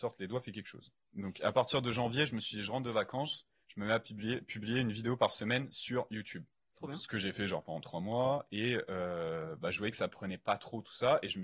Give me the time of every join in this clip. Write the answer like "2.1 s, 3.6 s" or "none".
6.7 s